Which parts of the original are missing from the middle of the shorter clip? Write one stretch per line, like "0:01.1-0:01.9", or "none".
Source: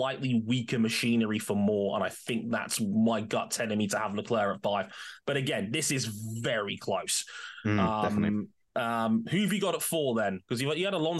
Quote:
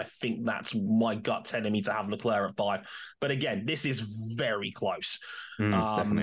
none